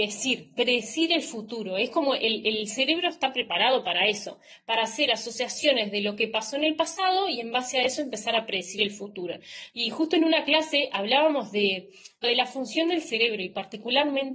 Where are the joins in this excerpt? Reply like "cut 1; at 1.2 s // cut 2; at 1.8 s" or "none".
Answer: cut 1; at 9.7 s // cut 2; at 12.2 s

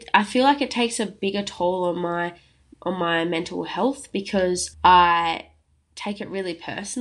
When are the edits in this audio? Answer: cut 1; at 4.7 s

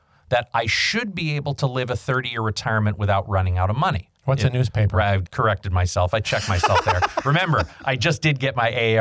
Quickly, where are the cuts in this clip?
cut 1; at 4.2 s // cut 2; at 5.3 s

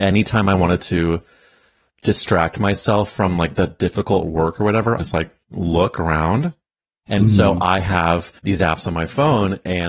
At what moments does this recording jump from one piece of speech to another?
cut 1; at 5.0 s // cut 2; at 7.1 s // cut 3; at 8.4 s

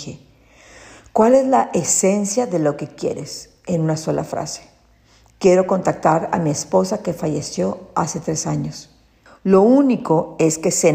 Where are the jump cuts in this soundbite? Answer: cut 1; at 9.3 s

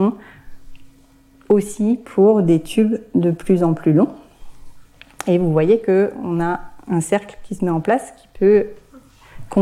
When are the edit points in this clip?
none

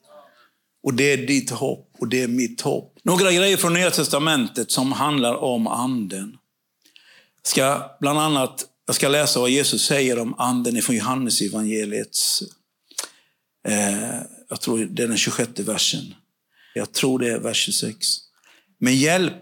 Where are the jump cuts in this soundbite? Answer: cut 1; at 3.0 s // cut 2; at 16.8 s

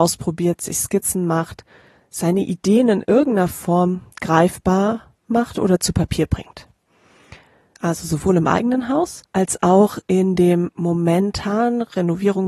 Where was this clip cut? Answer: cut 1; at 7.8 s // cut 2; at 9.3 s

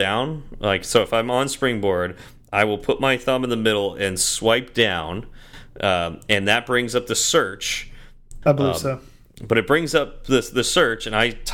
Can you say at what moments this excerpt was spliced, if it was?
cut 1; at 8.4 s

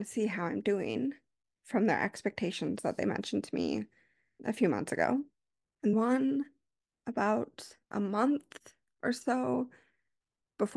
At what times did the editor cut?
cut 1; at 5.9 s // cut 2; at 7.8 s

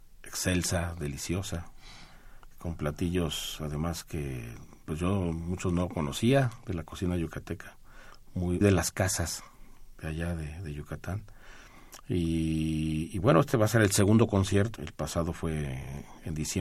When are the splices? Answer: cut 1; at 8.6 s // cut 2; at 14.8 s

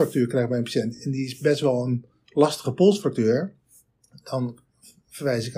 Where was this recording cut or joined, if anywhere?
none

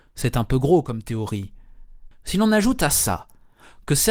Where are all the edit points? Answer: cut 1; at 2.1 s

